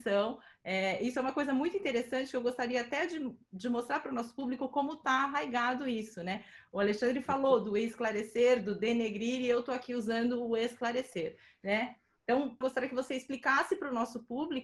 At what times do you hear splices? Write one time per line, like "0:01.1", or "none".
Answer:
0:12.6